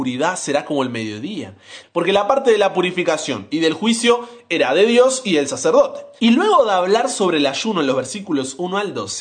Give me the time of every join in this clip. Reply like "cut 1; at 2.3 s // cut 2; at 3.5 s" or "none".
cut 1; at 1.8 s // cut 2; at 6.2 s